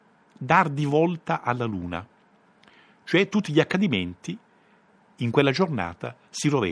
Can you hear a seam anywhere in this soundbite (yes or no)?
no